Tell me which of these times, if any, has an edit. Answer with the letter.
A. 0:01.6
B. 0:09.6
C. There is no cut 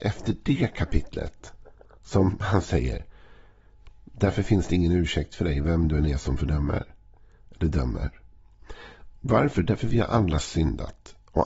C